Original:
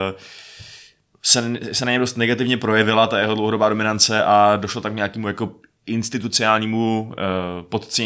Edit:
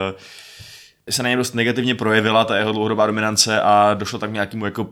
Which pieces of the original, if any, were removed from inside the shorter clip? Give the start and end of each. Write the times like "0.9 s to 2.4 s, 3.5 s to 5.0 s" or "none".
1.1 s to 1.7 s